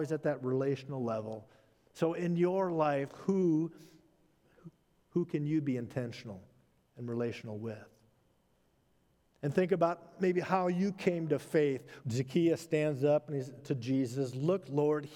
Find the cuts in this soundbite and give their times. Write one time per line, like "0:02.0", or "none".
0:12.0
0:13.6